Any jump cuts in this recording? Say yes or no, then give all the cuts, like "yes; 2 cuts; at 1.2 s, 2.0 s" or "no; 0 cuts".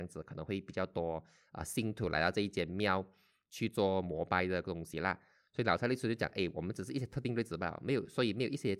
no; 0 cuts